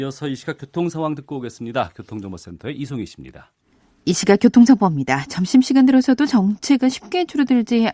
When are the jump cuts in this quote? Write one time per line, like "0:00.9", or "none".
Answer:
none

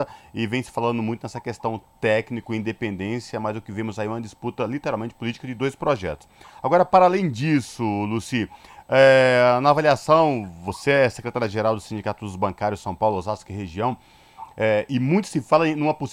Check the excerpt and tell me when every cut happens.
none

